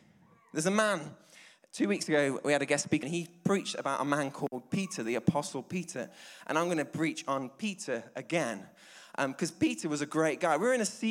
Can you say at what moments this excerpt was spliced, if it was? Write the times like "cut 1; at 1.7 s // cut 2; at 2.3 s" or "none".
cut 1; at 3.0 s